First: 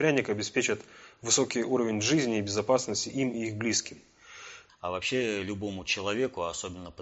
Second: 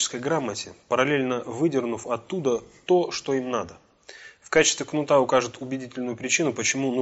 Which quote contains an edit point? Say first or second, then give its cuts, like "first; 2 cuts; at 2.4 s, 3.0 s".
first; 1 cut; at 4.7 s